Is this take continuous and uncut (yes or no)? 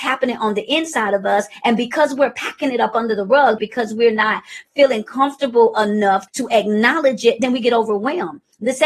no